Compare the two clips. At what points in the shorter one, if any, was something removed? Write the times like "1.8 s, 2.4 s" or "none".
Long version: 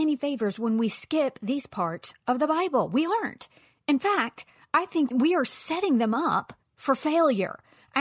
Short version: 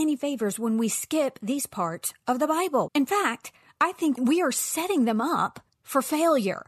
2.9 s